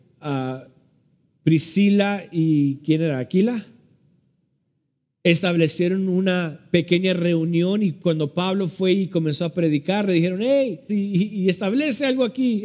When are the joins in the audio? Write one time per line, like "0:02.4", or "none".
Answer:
0:10.9